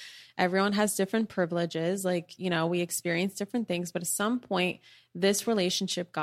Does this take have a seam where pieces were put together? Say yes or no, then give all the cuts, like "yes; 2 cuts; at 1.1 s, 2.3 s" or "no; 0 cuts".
no; 0 cuts